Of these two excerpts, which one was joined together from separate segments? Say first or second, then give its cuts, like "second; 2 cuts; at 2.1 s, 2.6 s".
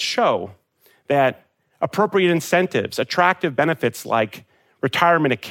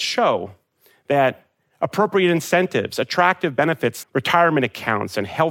second; 1 cut; at 4.0 s